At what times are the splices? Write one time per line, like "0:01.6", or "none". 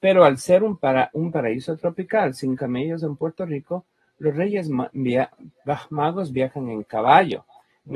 none